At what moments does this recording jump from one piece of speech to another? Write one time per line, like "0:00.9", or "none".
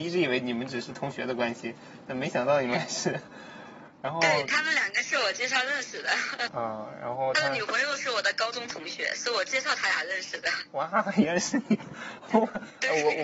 0:06.5